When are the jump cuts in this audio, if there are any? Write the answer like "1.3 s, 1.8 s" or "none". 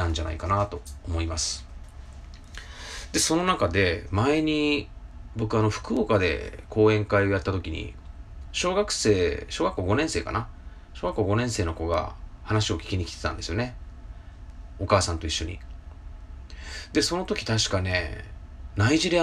none

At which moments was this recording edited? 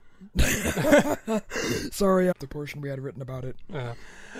2.3 s

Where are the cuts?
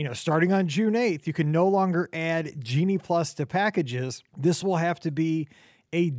4.3 s

